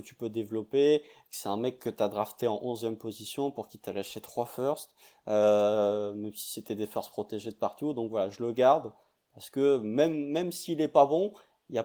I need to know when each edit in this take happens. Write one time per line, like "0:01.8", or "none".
none